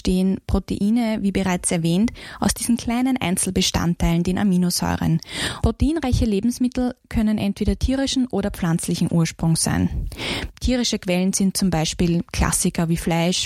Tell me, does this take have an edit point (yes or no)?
yes